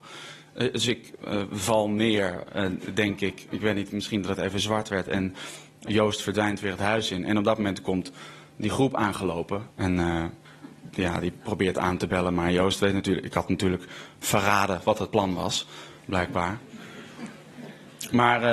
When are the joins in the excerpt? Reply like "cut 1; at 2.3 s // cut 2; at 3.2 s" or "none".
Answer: cut 1; at 9.7 s